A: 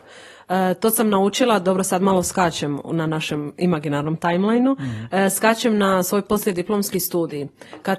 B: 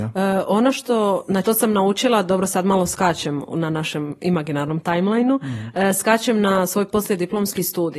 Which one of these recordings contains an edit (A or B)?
B